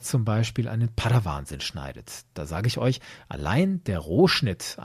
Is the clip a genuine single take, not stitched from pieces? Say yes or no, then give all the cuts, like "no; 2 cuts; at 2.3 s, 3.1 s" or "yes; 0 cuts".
yes; 0 cuts